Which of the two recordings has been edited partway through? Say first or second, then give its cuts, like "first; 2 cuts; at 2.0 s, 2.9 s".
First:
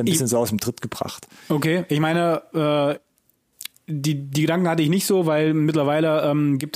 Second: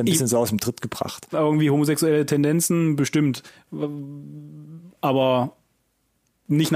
second; 1 cut; at 1.3 s